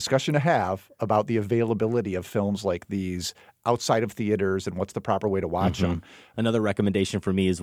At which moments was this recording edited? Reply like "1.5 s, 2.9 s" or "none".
6.3 s